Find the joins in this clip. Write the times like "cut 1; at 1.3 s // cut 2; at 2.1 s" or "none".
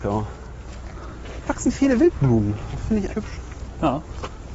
cut 1; at 1.4 s // cut 2; at 3.1 s